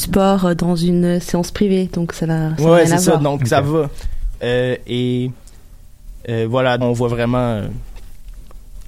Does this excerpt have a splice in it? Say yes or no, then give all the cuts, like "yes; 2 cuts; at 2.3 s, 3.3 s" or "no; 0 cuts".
yes; 2 cuts; at 4.3 s, 6.8 s